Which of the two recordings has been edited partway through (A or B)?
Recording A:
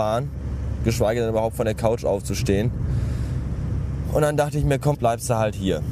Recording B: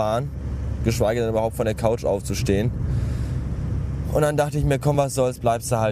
A